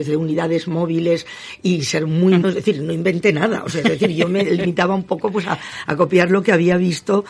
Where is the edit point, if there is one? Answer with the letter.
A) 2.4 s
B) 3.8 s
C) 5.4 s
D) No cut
A